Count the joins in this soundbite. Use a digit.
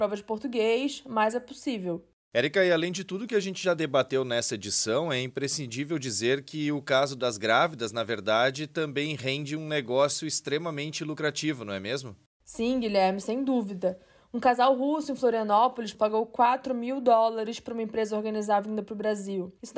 1